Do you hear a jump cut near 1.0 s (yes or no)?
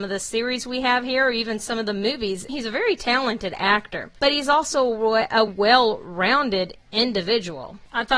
no